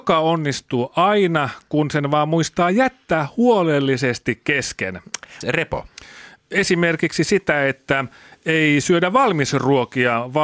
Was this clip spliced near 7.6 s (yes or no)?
no